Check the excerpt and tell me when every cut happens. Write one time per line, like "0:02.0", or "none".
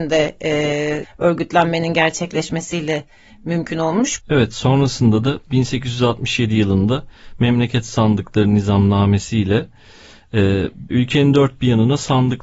0:01.0
0:04.2
0:10.9